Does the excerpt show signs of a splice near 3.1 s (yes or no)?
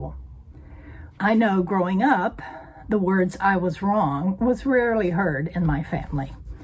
no